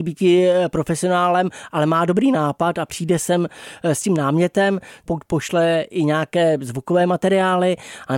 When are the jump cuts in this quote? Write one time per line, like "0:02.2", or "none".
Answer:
0:05.1